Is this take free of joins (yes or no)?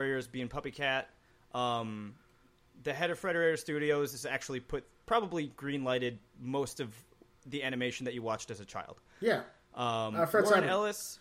yes